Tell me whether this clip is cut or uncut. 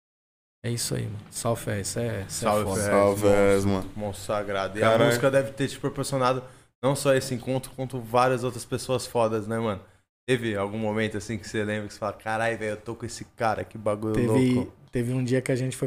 uncut